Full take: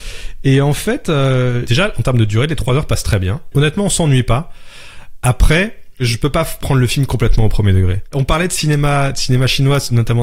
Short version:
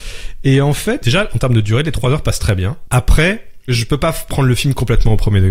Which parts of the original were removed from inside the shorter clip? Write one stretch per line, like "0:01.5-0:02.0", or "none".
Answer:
0:01.0-0:01.7
0:03.5-0:05.2